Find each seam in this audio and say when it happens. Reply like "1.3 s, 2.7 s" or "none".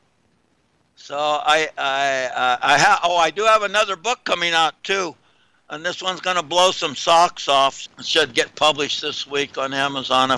7.9 s